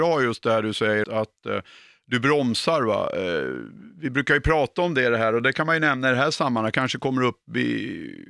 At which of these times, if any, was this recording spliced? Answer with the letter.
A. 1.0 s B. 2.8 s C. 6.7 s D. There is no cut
A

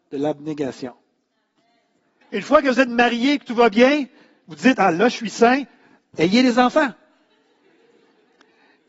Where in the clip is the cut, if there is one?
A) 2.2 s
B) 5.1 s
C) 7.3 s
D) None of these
A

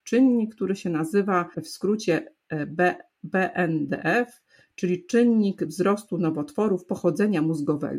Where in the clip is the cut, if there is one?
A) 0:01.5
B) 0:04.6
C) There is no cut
A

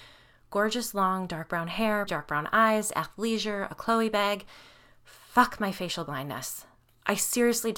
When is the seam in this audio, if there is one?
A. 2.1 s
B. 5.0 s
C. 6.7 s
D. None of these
A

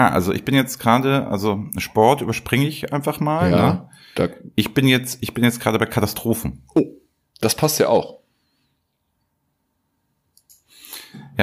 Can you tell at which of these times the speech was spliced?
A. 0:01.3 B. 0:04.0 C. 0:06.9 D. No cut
D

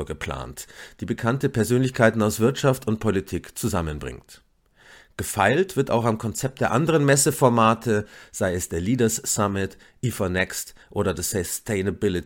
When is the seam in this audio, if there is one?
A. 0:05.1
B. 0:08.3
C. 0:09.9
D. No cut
D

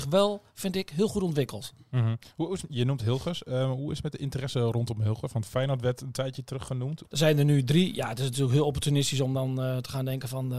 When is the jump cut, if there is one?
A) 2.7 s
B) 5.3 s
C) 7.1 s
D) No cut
C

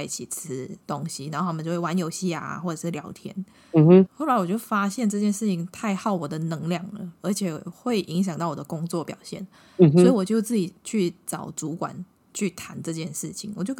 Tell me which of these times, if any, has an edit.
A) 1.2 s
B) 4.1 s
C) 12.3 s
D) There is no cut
B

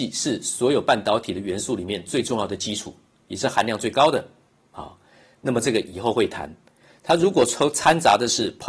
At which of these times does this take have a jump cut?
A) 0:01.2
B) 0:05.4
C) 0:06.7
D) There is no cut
D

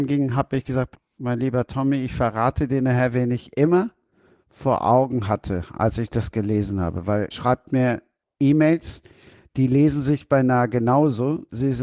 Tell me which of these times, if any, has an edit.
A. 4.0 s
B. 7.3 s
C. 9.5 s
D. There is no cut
B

